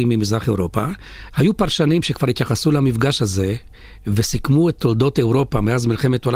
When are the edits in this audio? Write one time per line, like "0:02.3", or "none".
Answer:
0:01.3